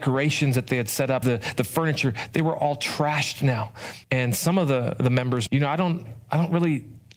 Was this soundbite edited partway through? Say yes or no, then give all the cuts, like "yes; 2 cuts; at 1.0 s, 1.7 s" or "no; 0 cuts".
yes; 3 cuts; at 1.2 s, 4.0 s, 5.5 s